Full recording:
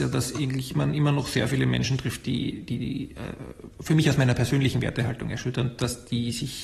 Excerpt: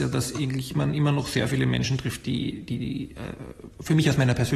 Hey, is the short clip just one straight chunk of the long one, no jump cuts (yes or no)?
yes